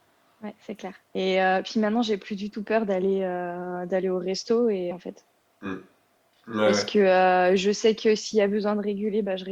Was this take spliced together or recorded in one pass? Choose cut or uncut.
cut